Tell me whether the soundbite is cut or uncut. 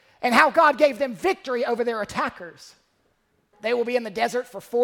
cut